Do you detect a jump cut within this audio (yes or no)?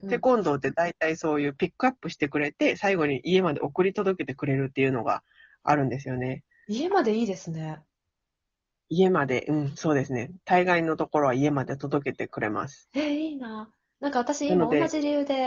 no